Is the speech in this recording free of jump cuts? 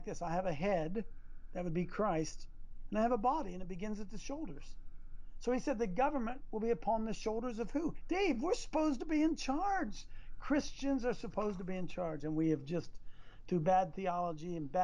no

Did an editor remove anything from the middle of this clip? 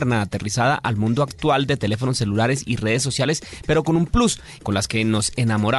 yes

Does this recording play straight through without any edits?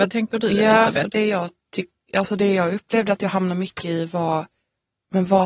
yes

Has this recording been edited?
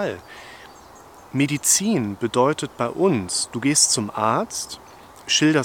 no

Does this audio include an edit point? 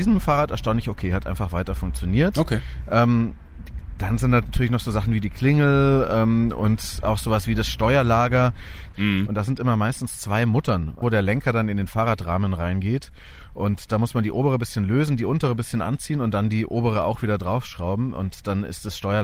yes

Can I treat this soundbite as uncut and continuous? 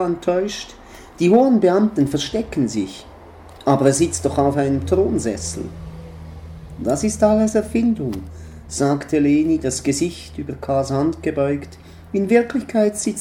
yes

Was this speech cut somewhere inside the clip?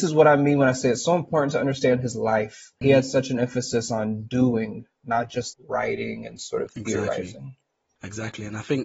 yes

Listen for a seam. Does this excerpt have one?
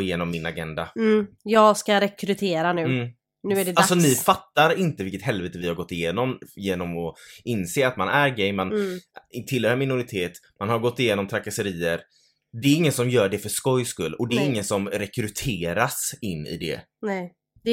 no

